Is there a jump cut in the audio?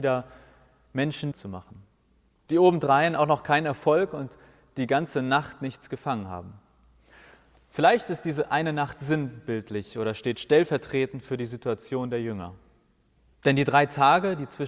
yes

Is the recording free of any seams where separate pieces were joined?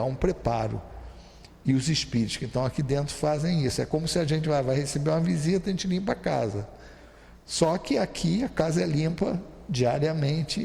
yes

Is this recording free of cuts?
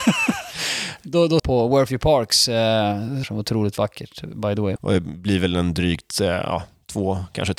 no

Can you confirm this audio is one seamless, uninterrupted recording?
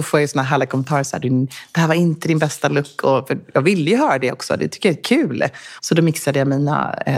no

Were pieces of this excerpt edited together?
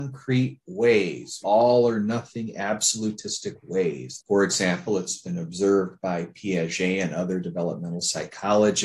yes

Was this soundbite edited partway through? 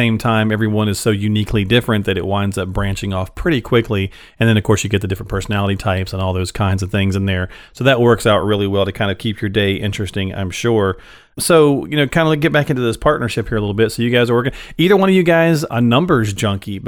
no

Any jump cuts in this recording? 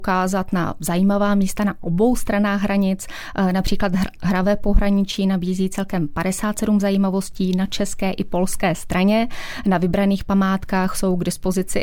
no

